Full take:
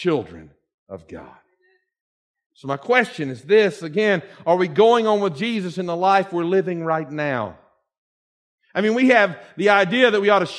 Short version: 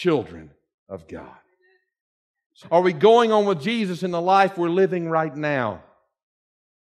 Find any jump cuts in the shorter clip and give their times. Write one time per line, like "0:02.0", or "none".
0:02.6